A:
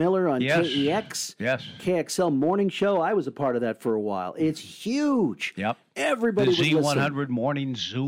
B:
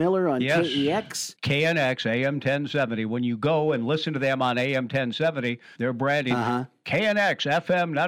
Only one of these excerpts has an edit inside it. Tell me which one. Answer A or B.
B